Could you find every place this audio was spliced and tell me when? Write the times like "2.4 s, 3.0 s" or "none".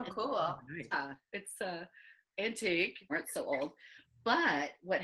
0.9 s, 3.1 s